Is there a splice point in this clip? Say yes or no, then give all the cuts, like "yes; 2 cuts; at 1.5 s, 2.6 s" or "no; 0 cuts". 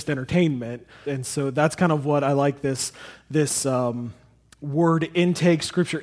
yes; 1 cut; at 1.0 s